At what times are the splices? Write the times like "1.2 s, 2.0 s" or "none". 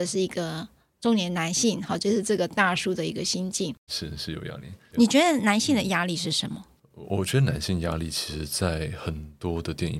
3.9 s